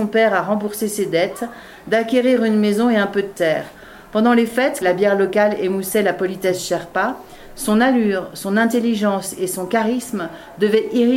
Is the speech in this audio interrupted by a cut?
yes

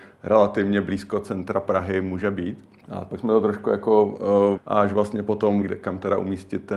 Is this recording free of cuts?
no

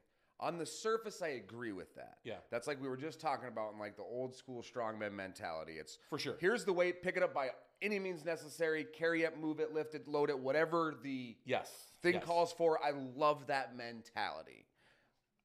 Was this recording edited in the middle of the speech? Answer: no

